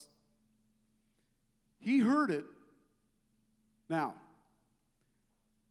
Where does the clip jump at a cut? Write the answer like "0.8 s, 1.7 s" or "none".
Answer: 3.8 s

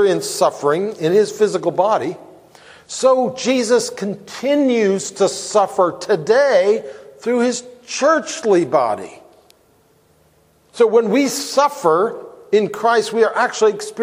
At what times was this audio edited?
none

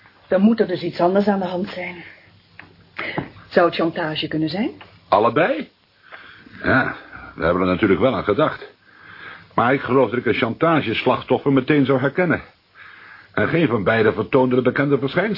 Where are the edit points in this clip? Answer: none

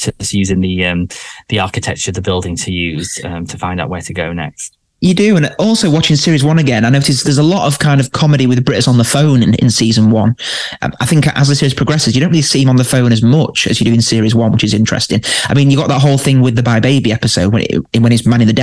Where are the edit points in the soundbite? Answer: 16.6 s

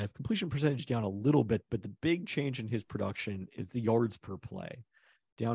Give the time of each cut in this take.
none

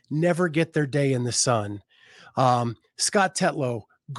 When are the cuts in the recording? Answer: none

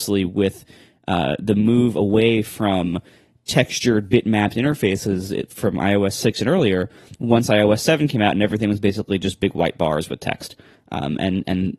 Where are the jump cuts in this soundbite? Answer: none

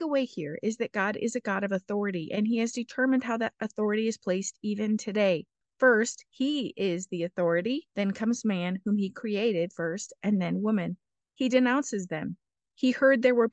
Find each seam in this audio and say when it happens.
7.9 s, 11.2 s

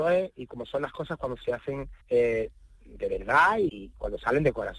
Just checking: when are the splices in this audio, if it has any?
2.0 s, 3.7 s

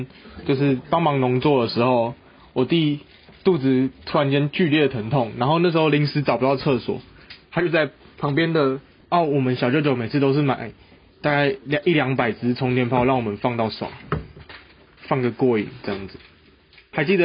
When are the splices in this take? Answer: 9.0 s

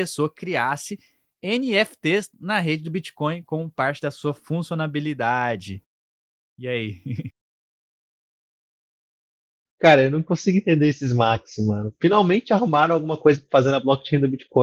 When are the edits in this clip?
none

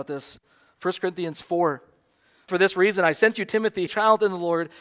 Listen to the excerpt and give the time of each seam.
2.5 s, 3.9 s

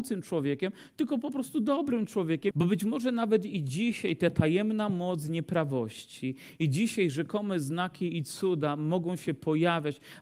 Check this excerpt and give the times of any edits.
2.5 s

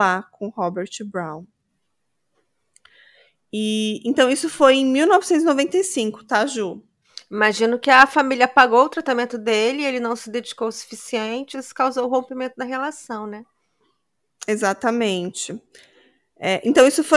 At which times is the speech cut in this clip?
11.5 s

